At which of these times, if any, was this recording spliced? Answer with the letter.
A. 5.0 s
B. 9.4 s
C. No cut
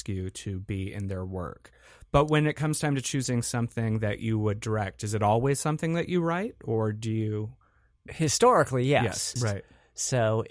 B